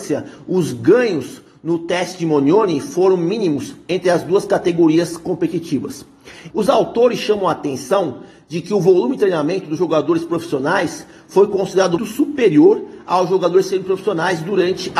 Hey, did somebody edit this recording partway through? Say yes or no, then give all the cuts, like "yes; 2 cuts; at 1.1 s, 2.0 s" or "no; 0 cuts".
yes; 2 cuts; at 6.5 s, 12.0 s